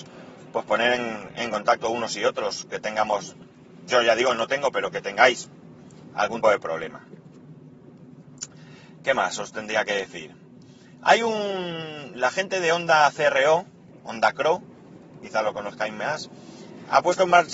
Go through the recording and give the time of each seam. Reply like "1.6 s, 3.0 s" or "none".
6.4 s